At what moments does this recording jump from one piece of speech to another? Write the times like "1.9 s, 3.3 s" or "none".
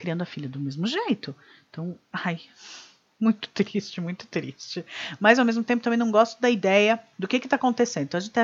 none